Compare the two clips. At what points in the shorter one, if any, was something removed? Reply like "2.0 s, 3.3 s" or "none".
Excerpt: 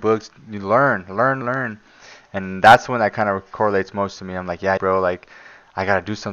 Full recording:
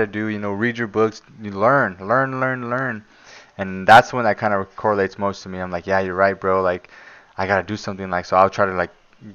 1.4 s, 4.8 s

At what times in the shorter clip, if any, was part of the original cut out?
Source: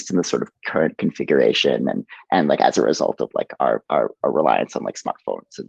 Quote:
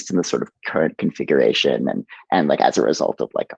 none

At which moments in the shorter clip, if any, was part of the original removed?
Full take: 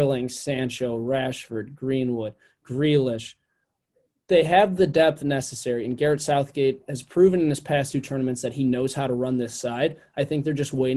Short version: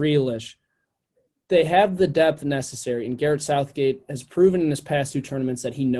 none

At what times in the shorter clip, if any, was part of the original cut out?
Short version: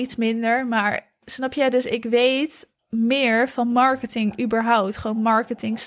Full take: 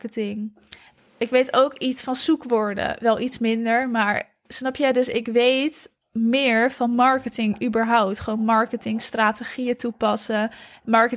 none

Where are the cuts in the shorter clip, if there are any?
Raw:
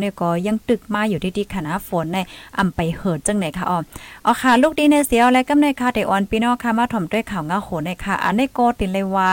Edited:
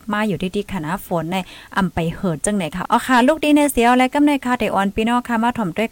2.9 s

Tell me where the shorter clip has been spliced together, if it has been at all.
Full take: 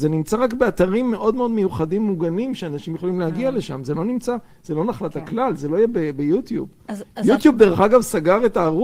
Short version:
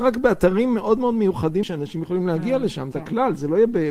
1.6 s, 2.9 s

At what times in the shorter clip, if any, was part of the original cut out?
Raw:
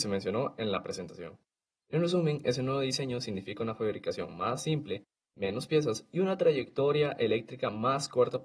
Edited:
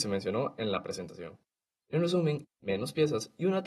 2.4 s

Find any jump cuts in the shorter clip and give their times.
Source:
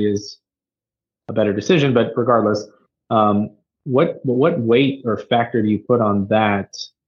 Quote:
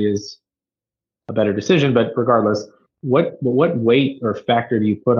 2.9 s

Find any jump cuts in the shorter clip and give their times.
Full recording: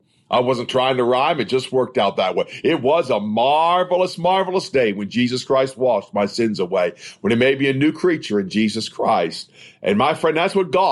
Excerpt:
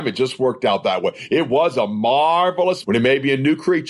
2.8 s

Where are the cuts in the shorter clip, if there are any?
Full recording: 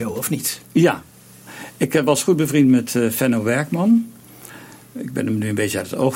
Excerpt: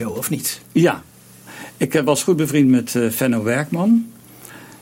none

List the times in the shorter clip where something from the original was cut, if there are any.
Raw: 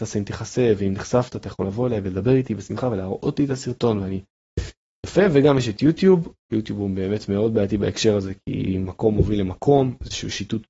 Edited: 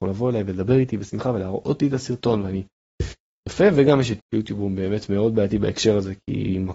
4.2 s

